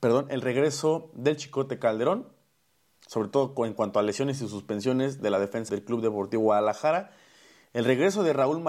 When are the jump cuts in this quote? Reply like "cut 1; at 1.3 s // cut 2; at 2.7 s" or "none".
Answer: cut 1; at 5.7 s

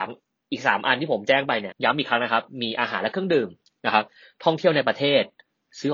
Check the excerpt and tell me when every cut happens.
cut 1; at 1.7 s

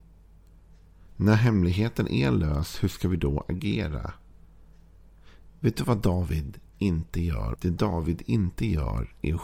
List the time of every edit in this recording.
cut 1; at 7.5 s

